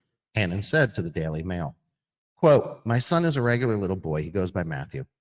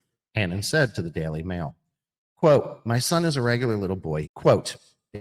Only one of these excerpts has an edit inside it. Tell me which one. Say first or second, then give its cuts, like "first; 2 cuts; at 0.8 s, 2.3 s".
second; 1 cut; at 4.2 s